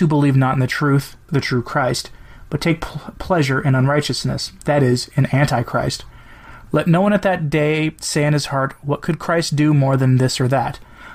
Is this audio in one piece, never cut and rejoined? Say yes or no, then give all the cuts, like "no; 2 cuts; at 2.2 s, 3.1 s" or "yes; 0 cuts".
no; 2 cuts; at 1.3 s, 6.7 s